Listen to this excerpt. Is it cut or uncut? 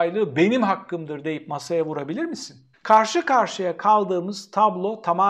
cut